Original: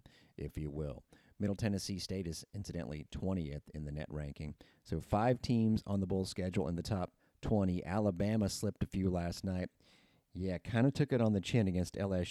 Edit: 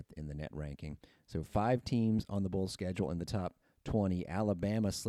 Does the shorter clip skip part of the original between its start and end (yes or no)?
no